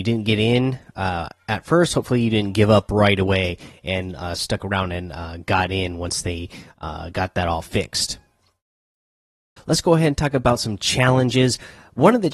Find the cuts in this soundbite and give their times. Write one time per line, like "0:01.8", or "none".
0:09.6